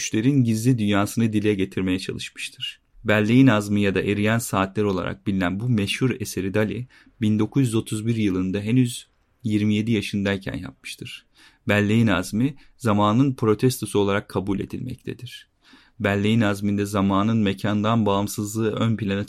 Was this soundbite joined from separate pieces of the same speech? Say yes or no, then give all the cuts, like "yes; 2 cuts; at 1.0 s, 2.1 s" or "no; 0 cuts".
no; 0 cuts